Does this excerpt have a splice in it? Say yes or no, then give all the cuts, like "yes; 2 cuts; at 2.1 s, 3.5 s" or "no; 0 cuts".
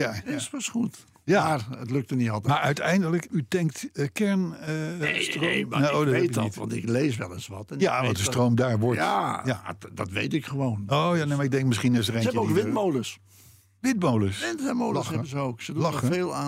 yes; 1 cut; at 3.3 s